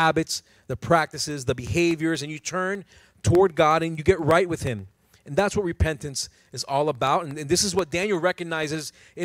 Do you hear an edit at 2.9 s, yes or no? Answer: no